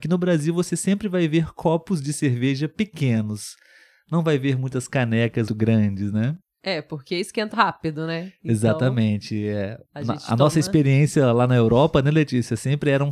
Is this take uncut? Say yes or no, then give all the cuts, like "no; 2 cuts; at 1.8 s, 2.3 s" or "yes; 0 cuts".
no; 2 cuts; at 5.5 s, 7.5 s